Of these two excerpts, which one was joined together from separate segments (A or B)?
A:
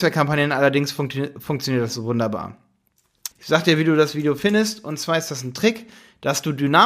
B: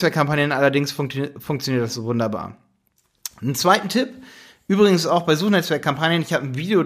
A